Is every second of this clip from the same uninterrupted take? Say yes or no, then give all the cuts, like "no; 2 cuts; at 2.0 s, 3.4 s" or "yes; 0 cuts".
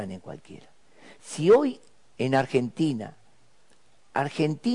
yes; 0 cuts